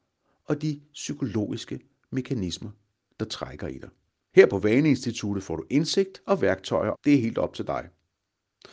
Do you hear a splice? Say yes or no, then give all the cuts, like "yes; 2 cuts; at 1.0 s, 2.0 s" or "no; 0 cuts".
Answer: yes; 2 cuts; at 4.3 s, 6.9 s